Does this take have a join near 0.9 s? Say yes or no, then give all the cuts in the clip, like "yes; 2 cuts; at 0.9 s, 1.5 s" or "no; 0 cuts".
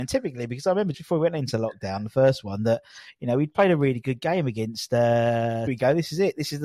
yes; 2 cuts; at 0.9 s, 5.7 s